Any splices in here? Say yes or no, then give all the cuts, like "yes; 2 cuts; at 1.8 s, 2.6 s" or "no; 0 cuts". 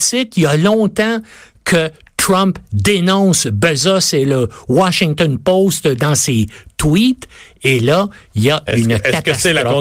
no; 0 cuts